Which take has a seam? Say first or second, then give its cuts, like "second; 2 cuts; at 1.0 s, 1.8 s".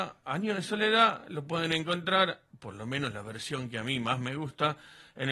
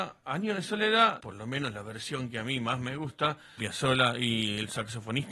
second; 2 cuts; at 1.2 s, 3.6 s